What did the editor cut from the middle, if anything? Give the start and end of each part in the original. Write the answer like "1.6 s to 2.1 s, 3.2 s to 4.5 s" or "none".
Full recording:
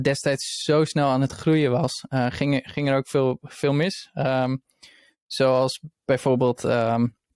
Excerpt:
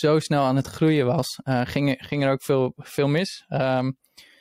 none